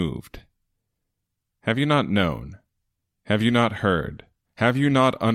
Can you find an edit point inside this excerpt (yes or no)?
yes